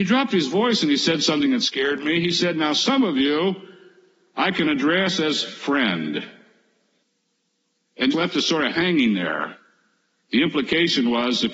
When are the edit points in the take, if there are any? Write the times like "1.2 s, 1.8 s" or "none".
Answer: 8.1 s